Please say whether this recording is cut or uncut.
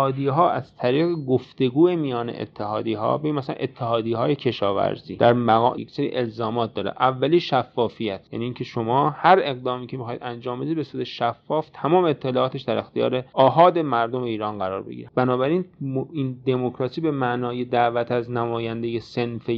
cut